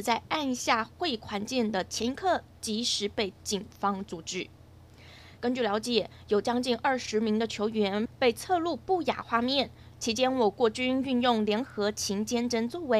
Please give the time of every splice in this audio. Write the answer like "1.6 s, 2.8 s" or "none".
5.4 s, 9.9 s

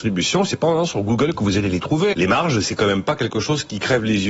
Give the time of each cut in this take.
2.1 s

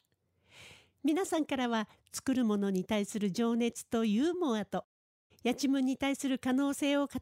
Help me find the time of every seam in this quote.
5.3 s

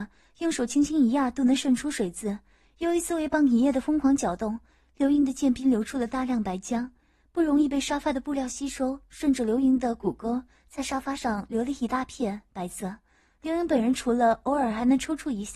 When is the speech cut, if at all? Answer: none

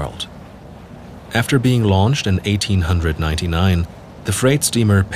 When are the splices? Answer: none

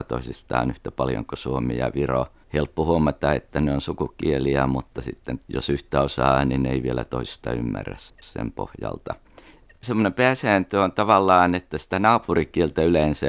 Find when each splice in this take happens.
none

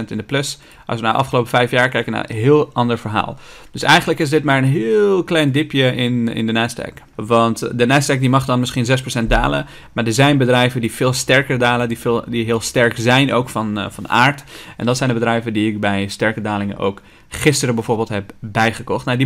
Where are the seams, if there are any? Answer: 7.1 s

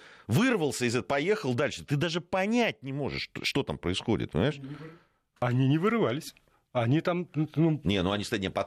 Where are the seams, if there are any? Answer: none

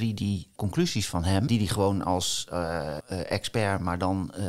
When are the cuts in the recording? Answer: 1.5 s, 3.0 s

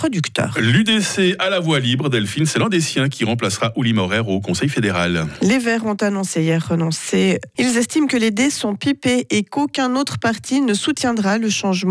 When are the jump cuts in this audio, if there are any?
7.5 s

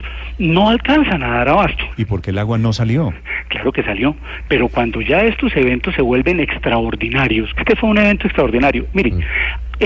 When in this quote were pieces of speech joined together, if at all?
1.9 s, 4.5 s, 7.5 s

